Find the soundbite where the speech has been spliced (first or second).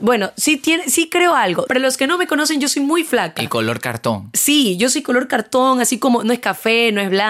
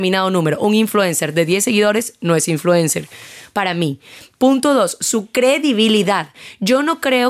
first